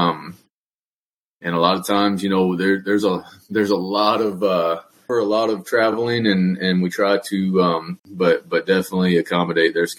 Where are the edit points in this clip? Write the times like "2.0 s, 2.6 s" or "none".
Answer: 5.1 s, 8.0 s